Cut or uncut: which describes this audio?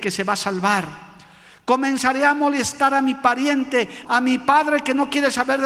cut